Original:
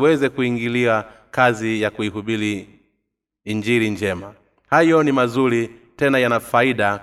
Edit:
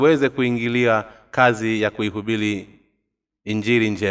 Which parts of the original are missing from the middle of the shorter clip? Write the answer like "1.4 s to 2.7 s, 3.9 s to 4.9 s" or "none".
none